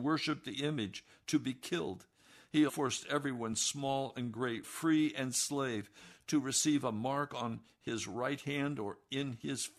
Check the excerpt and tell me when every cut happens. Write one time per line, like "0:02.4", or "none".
0:02.7
0:04.6